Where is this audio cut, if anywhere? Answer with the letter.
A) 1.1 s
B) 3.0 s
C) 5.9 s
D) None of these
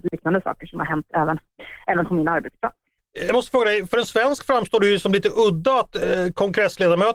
B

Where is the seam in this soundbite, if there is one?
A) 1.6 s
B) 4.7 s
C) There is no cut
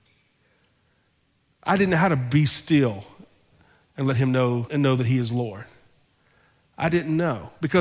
B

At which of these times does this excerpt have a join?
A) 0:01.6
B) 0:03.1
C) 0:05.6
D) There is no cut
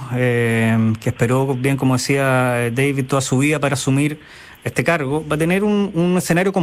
D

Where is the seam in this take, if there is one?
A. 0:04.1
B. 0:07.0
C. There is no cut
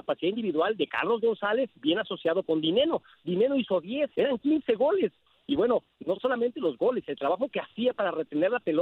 A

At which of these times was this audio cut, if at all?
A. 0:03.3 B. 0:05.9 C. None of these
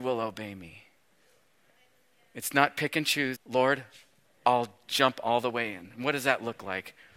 A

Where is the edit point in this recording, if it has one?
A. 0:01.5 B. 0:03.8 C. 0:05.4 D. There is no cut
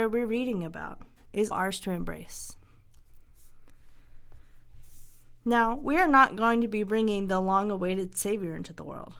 A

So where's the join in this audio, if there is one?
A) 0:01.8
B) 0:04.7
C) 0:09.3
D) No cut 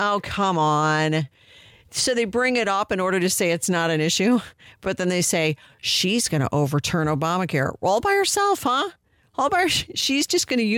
D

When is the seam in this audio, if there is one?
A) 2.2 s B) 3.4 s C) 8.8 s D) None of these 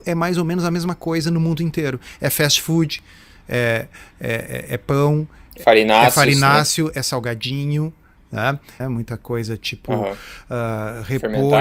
C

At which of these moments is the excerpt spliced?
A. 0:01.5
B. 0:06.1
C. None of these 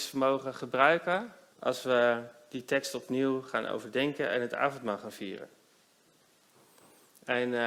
A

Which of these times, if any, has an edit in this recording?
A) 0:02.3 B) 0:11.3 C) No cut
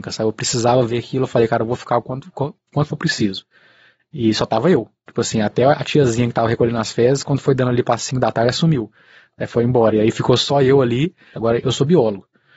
B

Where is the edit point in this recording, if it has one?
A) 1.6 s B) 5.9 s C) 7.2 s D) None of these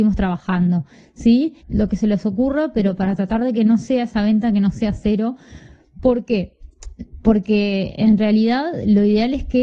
A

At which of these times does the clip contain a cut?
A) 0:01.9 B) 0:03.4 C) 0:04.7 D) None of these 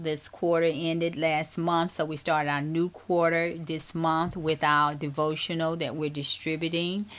D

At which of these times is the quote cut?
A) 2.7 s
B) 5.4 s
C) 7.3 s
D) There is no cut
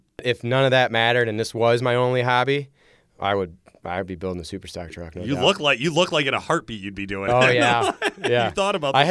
D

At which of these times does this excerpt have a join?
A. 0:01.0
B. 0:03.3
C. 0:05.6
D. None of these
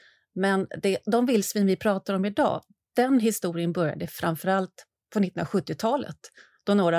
D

